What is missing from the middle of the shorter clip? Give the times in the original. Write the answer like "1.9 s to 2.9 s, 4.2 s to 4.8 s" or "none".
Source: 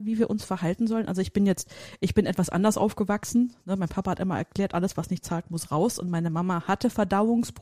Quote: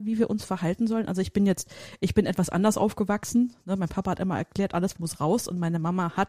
4.9 s to 5.4 s